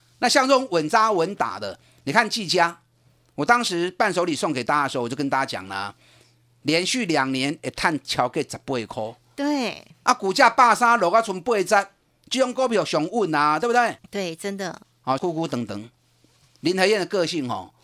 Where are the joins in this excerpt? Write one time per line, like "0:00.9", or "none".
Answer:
0:14.0
0:15.2